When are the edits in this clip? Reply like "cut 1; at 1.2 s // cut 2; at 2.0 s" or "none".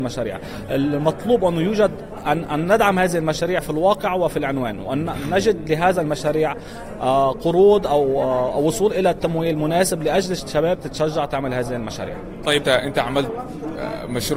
cut 1; at 12.6 s